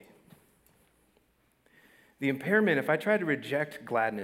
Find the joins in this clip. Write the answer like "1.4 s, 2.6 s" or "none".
none